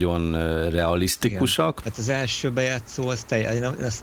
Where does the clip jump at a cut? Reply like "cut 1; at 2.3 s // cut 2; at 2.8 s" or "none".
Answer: cut 1; at 1.8 s